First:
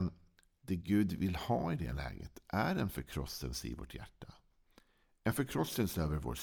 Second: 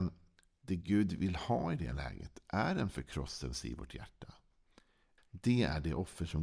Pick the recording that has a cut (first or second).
second